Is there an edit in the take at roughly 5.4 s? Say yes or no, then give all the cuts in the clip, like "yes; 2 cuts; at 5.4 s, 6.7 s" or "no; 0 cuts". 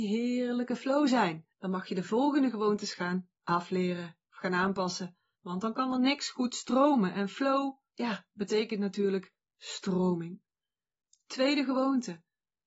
yes; 2 cuts; at 1.5 s, 5.4 s